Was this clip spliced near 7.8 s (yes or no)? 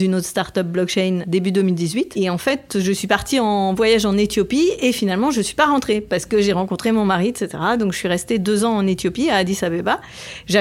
no